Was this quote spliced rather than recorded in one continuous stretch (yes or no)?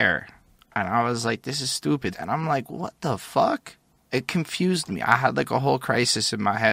yes